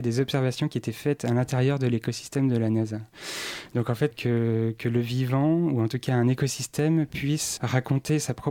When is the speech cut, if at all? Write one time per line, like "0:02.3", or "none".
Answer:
0:04.1
0:07.6